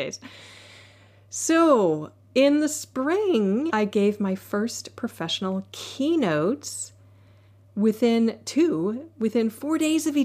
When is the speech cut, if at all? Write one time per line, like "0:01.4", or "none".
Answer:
0:03.7